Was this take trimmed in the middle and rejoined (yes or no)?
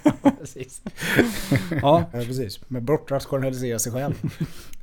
yes